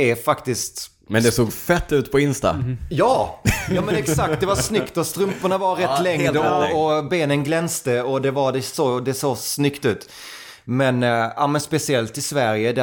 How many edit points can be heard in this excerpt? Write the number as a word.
zero